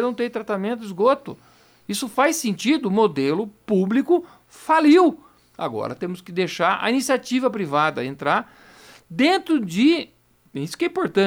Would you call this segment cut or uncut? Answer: uncut